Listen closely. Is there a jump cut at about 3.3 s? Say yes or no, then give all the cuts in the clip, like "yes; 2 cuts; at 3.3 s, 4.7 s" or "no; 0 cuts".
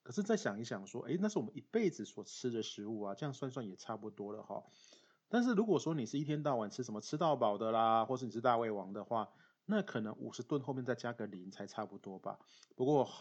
no; 0 cuts